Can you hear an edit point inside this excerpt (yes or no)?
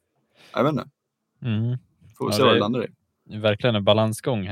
no